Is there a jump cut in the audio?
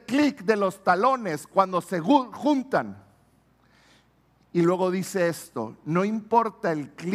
no; 0 cuts

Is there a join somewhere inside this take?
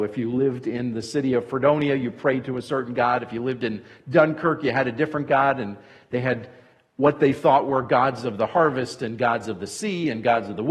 no; 0 cuts

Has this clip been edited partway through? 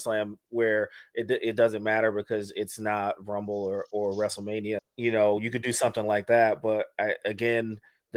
yes; 1 cut; at 4.8 s

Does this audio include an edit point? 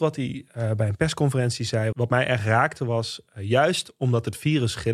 yes; 1 cut; at 1.9 s

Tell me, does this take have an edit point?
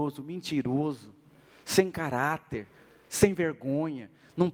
no; 0 cuts

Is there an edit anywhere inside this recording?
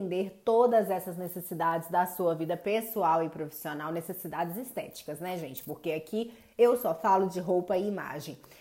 no; 0 cuts

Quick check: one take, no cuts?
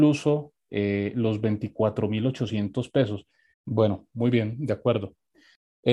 no; 1 cut; at 3.5 s

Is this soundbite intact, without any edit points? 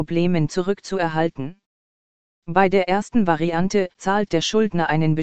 no; 1 cut; at 2.3 s

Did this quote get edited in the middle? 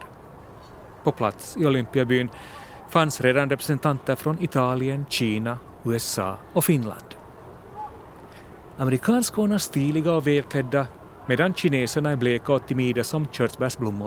yes; 1 cut; at 8.8 s

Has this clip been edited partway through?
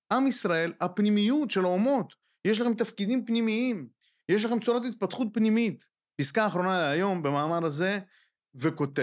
yes; 1 cut; at 6.1 s

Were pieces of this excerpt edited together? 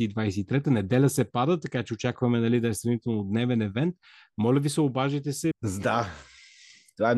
yes; 1 cut; at 5.5 s

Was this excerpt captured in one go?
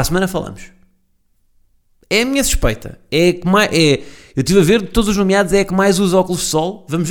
yes; 0 cuts

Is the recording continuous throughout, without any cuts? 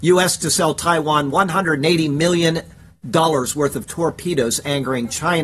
yes; 0 cuts

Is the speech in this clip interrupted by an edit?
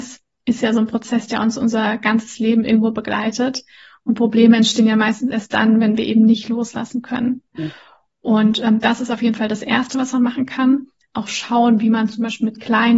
yes; 1 cut; at 7.6 s

